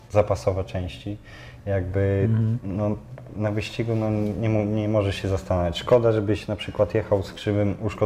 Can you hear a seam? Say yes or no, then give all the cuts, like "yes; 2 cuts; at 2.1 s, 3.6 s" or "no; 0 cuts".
no; 0 cuts